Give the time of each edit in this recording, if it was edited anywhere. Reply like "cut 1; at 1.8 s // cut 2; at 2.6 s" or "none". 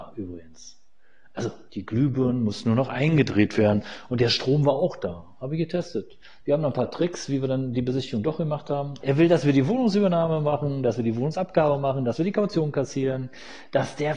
cut 1; at 6.4 s // cut 2; at 9.0 s